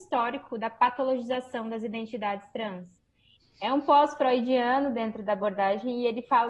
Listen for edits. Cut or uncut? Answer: cut